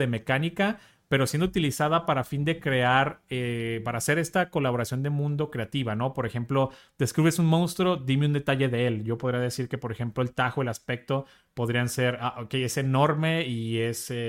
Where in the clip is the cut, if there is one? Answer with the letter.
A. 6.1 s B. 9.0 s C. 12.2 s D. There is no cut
D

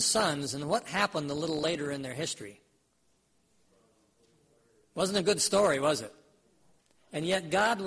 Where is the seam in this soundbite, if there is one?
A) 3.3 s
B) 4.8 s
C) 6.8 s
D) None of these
D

